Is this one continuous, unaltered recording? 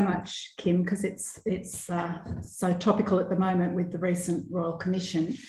yes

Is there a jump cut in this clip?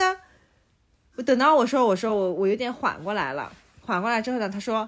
no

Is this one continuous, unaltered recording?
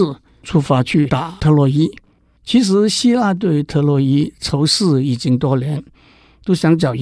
yes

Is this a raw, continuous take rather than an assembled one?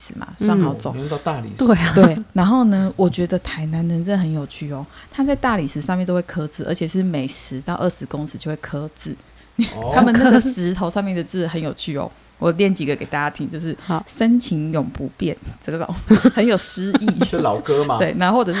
yes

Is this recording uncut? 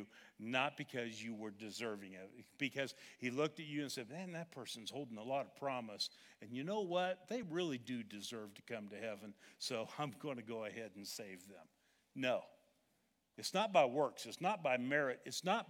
yes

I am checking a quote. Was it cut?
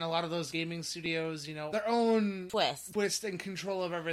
yes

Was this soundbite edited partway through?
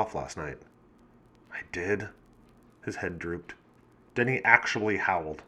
yes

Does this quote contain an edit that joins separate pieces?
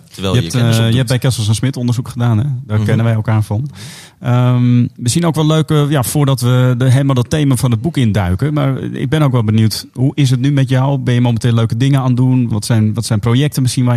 yes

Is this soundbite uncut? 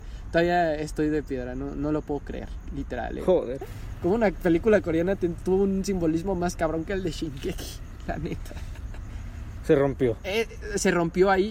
no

